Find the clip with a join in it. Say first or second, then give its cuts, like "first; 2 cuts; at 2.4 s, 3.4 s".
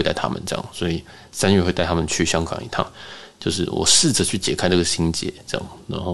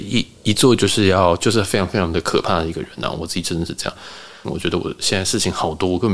second; 1 cut; at 4.4 s